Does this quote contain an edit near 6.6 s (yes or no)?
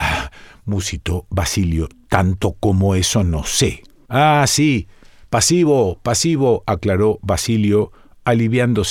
no